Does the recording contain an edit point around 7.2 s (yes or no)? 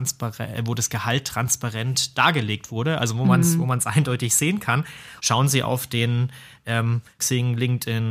yes